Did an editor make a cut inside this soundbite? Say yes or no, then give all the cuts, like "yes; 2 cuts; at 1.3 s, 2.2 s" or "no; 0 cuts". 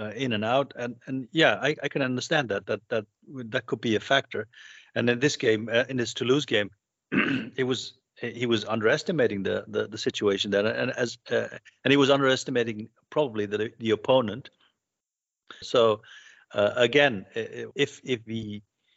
yes; 2 cuts; at 15.6 s, 17.7 s